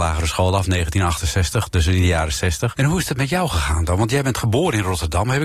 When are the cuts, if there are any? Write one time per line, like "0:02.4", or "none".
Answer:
0:02.7

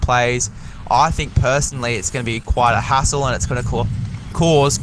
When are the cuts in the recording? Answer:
none

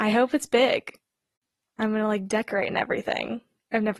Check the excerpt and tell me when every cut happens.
none

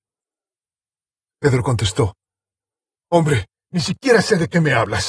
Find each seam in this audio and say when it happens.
none

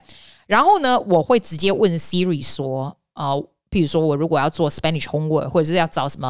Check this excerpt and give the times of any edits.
none

